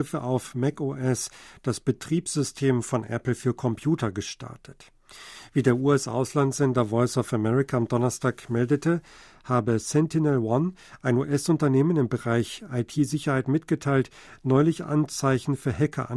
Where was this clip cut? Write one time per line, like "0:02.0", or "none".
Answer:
none

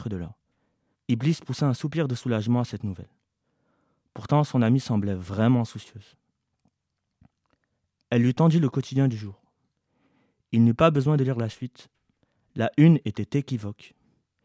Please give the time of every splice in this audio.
0:00.9

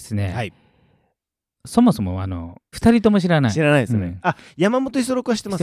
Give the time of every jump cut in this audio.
0:02.7

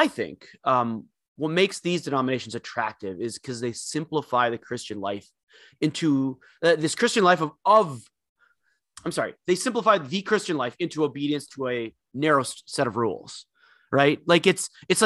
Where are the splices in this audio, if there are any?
none

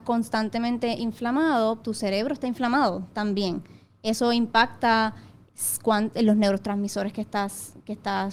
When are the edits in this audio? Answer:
0:01.8

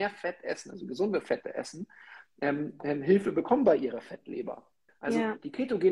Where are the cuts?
0:04.9

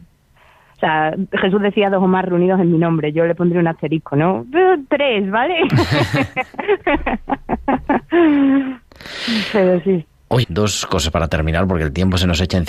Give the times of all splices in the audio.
0:10.4

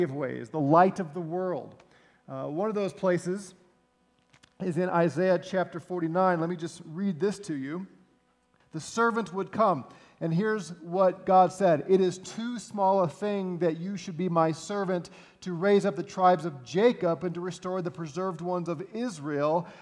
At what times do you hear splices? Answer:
0:08.6

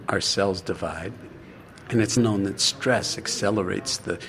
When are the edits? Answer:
0:02.2

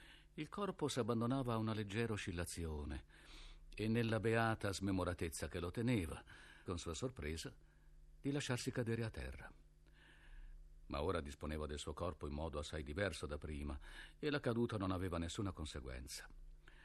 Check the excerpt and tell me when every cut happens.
0:06.7

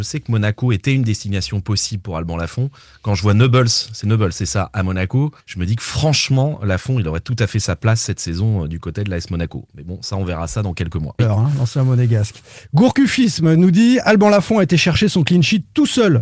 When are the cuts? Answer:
0:05.4
0:11.2

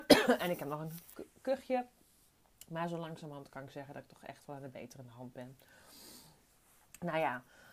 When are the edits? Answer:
none

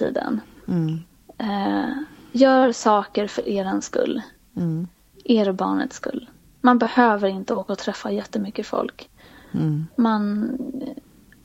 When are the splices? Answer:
none

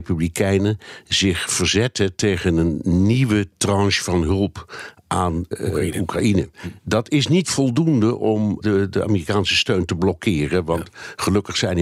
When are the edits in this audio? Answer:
0:05.5
0:08.6

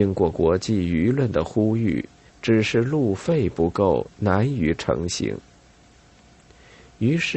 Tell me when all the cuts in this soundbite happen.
0:02.3

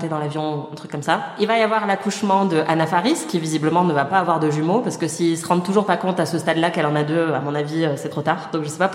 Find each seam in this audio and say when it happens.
none

